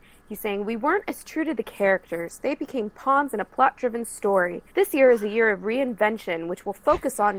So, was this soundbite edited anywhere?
yes; 1 cut; at 4.7 s

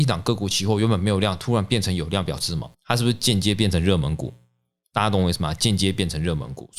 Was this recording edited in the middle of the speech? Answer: yes; 1 cut; at 2.7 s

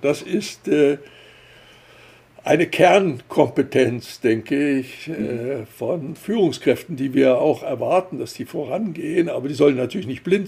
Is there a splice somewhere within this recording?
no; 0 cuts

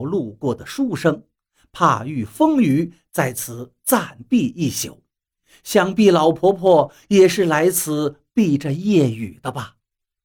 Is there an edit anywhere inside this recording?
no; 0 cuts

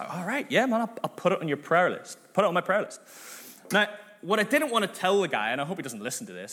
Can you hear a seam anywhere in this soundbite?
no; 0 cuts

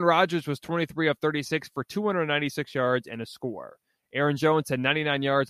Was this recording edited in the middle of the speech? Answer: no; 0 cuts

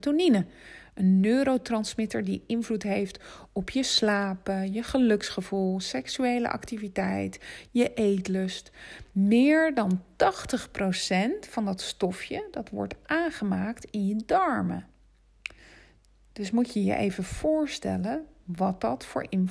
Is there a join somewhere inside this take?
no; 0 cuts

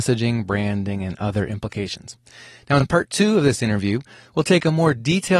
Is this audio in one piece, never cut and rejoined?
yes; 0 cuts

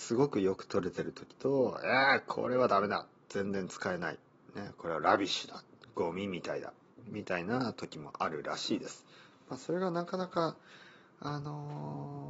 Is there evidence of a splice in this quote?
no; 0 cuts

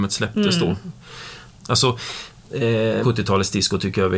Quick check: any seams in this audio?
yes; 2 cuts; at 1.6 s, 3.0 s

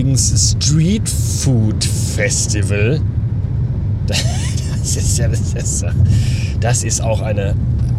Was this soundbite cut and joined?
no; 0 cuts

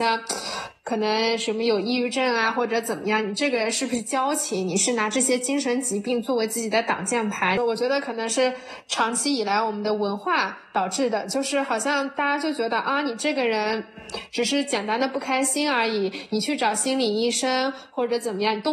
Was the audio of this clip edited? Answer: yes; 1 cut; at 7.6 s

